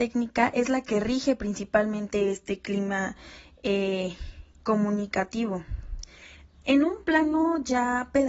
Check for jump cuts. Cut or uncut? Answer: uncut